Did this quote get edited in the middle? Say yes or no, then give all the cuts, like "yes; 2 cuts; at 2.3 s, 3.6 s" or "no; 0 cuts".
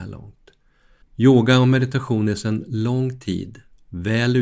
yes; 1 cut; at 1.0 s